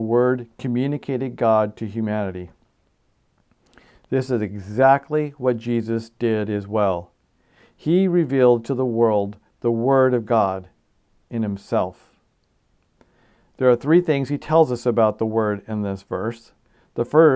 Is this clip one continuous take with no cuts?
yes; 0 cuts

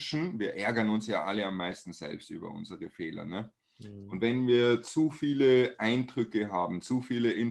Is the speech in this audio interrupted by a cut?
no; 0 cuts

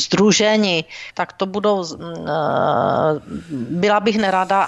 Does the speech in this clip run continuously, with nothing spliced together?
no; 1 cut; at 1.1 s

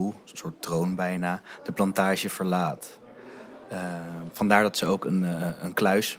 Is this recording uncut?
yes; 0 cuts

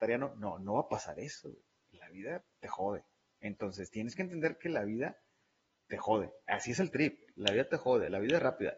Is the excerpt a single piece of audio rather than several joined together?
yes; 0 cuts

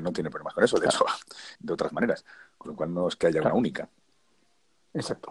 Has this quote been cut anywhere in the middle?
yes; 1 cut; at 1.6 s

